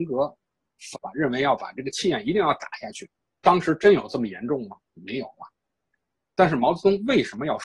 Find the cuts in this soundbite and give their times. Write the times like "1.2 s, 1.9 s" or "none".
0.9 s, 3.4 s